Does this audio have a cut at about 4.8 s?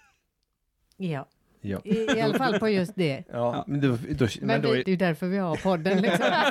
yes; 1 cut; at 4.8 s

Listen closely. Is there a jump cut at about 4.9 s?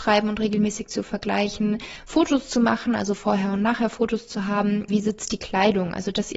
yes; 1 cut; at 4.9 s

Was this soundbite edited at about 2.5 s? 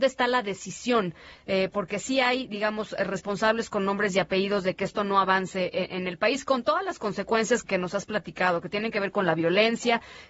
no; 1 cut; at 7.6 s

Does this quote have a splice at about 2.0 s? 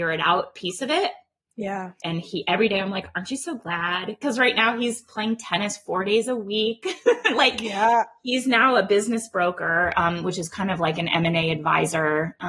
yes; 1 cut; at 2.0 s

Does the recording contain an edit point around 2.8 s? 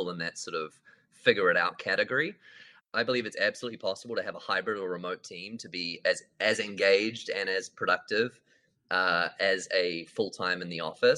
yes; 1 cut; at 2.8 s

